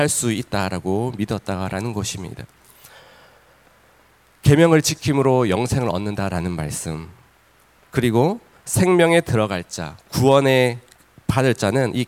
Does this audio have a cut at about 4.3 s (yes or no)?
no